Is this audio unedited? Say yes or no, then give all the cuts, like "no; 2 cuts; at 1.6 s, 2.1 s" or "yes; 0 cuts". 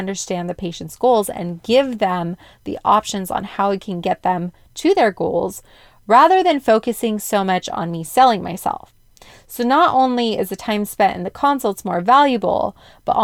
yes; 0 cuts